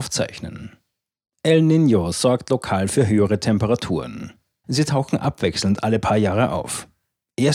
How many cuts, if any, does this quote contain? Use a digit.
1